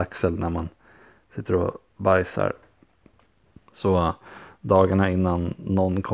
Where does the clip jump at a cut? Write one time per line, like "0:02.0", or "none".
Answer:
0:03.6